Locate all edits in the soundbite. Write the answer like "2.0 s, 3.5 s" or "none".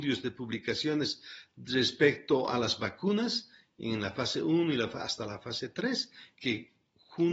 6.3 s